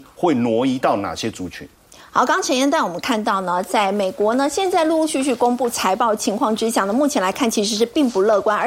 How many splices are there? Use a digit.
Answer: 0